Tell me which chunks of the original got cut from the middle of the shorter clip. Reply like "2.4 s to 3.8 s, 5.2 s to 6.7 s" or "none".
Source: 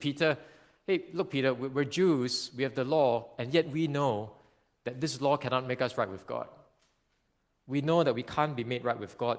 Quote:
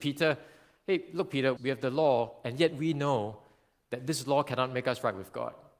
1.6 s to 2.5 s